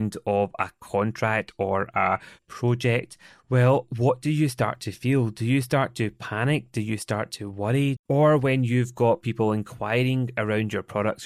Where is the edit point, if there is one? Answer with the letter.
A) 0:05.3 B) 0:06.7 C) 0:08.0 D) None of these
C